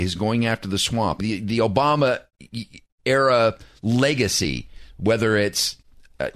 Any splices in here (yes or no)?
yes